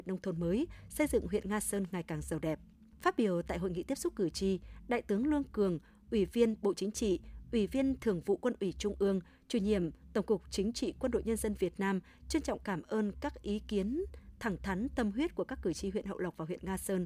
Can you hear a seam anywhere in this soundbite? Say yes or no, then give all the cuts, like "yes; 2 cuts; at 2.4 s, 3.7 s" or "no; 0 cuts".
no; 0 cuts